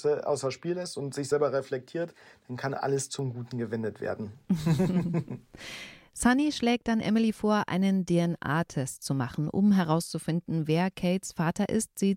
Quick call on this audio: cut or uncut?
uncut